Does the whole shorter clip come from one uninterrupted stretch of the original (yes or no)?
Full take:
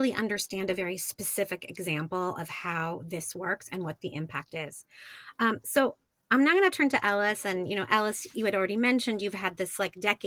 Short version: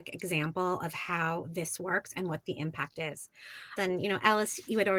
no